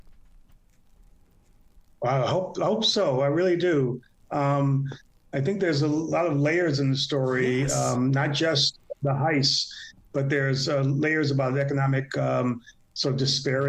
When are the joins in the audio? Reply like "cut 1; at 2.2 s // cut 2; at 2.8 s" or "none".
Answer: none